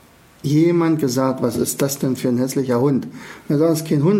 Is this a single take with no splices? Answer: yes; 0 cuts

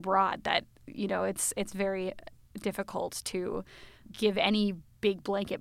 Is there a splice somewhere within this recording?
no; 0 cuts

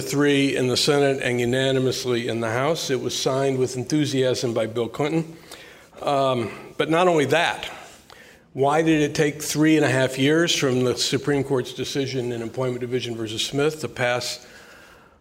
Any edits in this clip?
no; 0 cuts

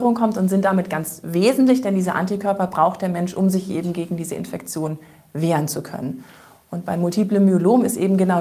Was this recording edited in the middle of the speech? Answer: no; 0 cuts

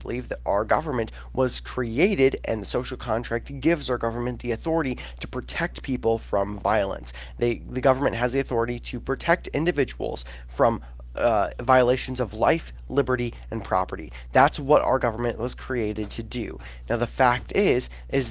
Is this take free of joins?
yes; 0 cuts

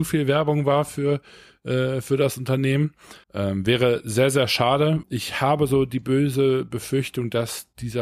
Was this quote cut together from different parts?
yes; 2 cuts; at 3.2 s, 5.0 s

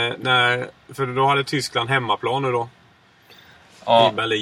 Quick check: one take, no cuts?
yes; 0 cuts

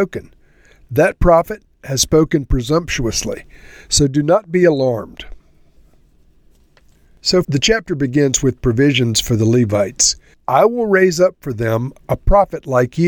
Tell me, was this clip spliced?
yes; 2 cuts; at 7.4 s, 10.3 s

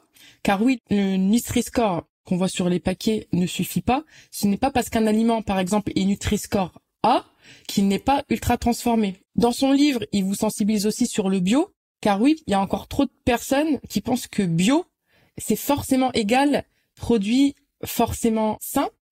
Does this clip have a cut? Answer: yes; 1 cut; at 9.2 s

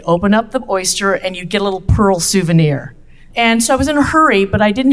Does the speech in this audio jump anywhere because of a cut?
yes; 1 cut; at 3.3 s

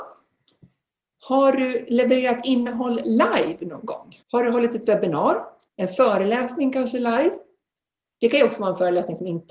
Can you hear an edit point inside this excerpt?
yes; 2 cuts; at 4.2 s, 5.7 s

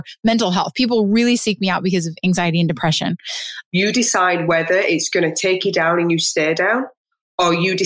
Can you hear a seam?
yes; 1 cut; at 3.7 s

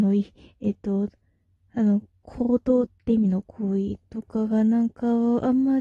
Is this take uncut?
yes; 0 cuts

